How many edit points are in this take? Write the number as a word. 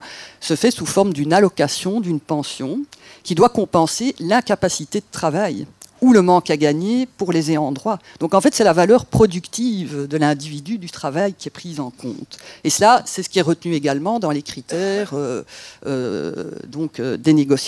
zero